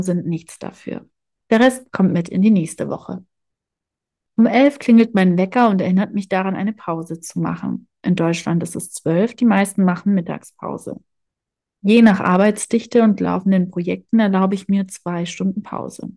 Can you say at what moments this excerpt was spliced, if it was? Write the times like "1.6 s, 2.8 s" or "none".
1.4 s